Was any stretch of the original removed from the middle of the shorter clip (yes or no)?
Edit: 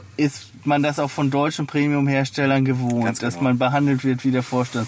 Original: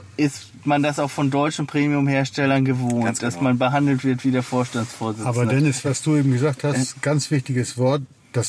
no